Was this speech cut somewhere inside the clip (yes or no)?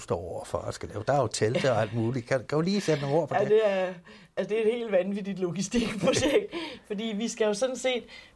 no